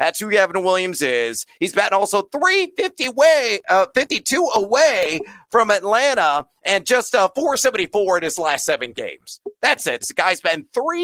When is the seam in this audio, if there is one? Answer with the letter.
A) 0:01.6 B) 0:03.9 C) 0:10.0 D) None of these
C